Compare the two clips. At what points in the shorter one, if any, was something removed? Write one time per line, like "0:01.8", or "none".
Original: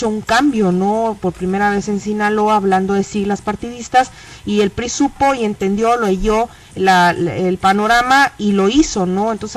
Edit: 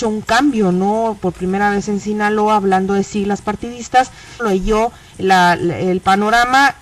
0:04.4